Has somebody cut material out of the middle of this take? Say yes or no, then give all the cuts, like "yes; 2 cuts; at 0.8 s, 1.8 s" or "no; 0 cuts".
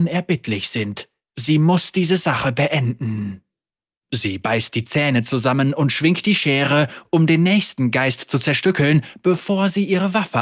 no; 0 cuts